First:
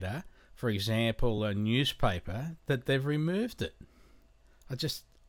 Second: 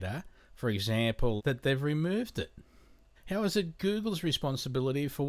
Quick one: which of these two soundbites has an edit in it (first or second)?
second